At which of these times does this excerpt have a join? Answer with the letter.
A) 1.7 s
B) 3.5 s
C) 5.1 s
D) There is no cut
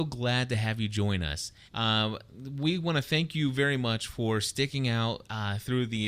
A